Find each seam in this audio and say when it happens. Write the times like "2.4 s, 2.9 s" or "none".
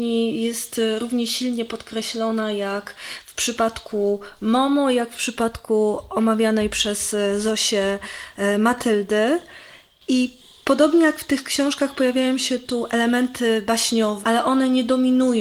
14.2 s